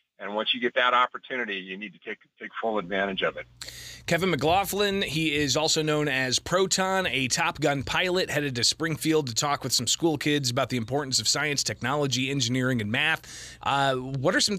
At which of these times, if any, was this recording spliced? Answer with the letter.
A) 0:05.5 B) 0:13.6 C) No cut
B